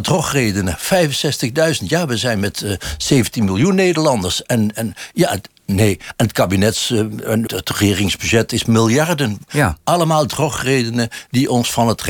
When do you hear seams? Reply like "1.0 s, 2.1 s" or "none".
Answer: 7.5 s, 9.5 s